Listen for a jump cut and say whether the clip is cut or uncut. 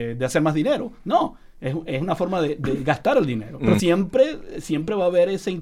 cut